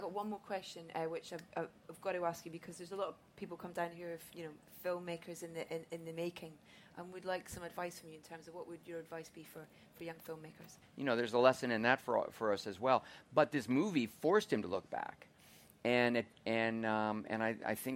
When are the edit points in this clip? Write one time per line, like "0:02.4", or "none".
0:10.8